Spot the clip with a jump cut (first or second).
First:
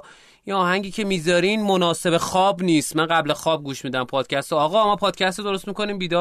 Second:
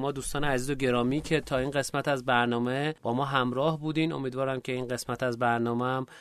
second